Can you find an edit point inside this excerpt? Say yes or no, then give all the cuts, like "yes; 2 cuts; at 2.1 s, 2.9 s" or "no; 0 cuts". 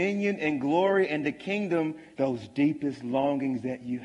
yes; 1 cut; at 2.1 s